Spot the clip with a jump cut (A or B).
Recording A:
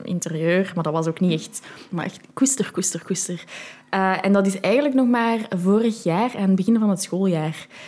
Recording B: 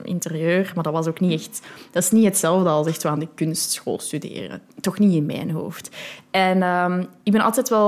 A